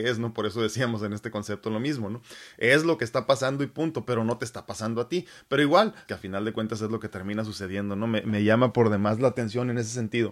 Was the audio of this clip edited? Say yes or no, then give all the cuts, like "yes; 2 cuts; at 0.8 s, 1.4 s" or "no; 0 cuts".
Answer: yes; 1 cut; at 6.1 s